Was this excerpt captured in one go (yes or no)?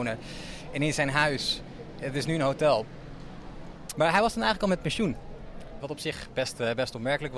no